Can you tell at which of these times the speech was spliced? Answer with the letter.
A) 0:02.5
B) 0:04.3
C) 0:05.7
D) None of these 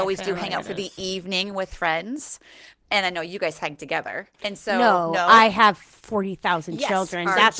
B